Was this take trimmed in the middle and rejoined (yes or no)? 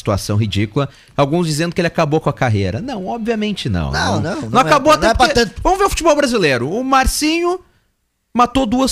no